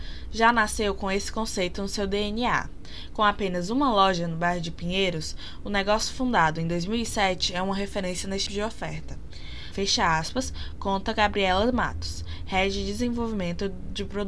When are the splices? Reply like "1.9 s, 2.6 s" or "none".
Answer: 8.5 s, 9.7 s